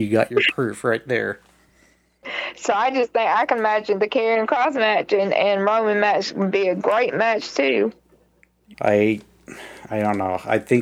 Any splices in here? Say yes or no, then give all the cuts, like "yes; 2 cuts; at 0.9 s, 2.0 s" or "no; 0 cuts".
yes; 2 cuts; at 2.2 s, 8.7 s